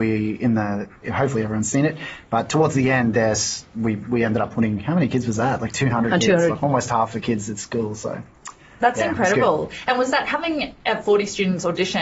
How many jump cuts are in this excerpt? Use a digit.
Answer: 1